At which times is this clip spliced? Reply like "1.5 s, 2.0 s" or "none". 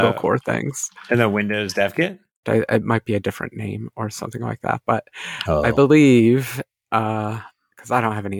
2.4 s

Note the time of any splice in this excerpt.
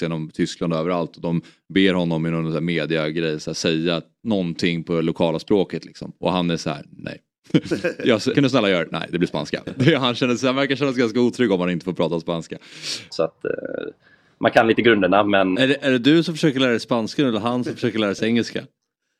8.3 s, 13.1 s, 15.5 s

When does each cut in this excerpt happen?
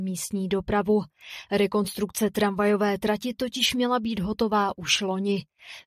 1.5 s

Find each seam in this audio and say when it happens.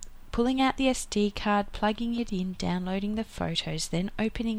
none

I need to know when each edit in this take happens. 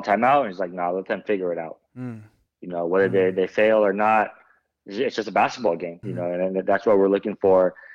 6.0 s

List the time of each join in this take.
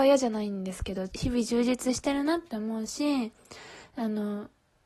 1.1 s

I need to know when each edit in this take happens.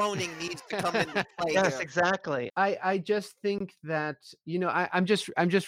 2.5 s

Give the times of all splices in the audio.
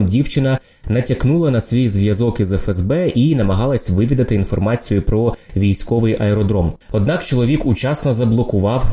none

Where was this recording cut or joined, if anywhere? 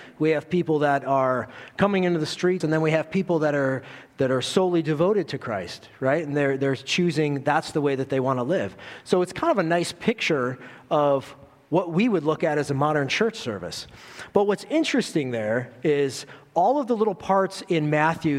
2.6 s

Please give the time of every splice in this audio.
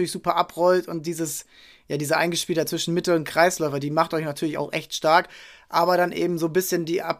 none

